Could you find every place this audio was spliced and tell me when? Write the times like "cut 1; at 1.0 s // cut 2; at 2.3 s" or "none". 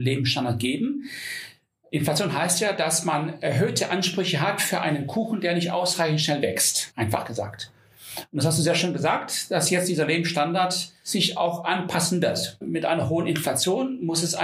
cut 1; at 6.9 s // cut 2; at 12.6 s

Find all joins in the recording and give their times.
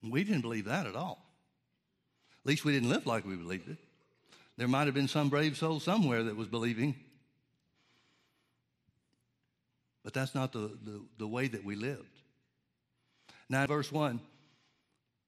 cut 1; at 13.7 s

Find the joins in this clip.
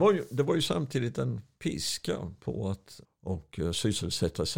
cut 1; at 3.0 s

